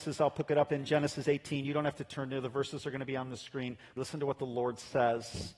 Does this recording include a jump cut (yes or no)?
yes